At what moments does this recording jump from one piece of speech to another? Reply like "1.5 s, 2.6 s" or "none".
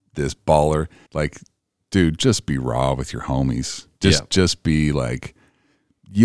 1.1 s